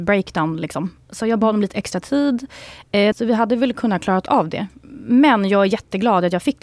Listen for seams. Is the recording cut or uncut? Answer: cut